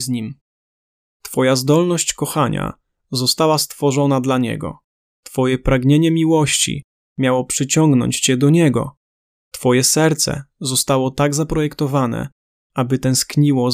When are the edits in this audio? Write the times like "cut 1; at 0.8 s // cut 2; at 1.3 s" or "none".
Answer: none